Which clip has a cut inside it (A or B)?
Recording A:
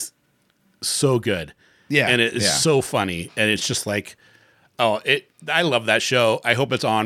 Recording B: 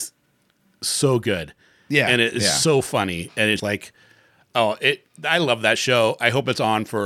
B